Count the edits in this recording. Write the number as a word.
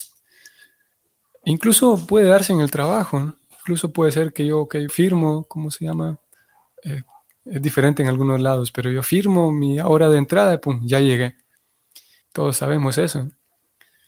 two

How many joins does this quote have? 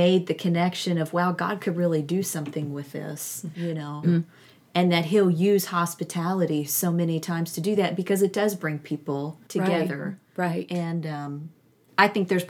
one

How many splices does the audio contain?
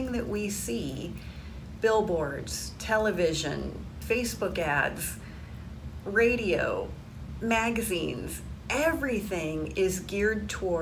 one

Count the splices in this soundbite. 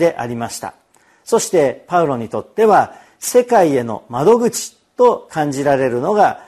zero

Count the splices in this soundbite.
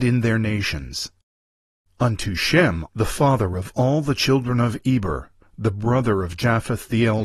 one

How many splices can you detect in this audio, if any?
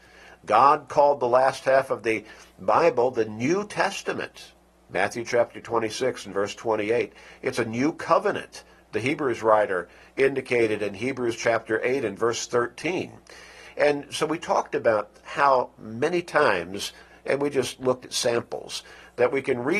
zero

